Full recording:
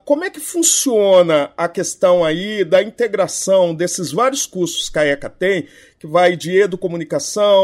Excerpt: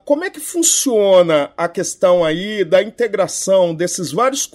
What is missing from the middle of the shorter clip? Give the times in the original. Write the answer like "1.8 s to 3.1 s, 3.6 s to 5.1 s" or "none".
none